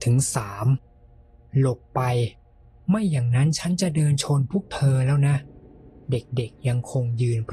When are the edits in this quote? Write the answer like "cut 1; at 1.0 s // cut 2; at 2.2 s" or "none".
cut 1; at 6.0 s